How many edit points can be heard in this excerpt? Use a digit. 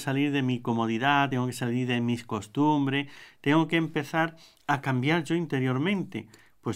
0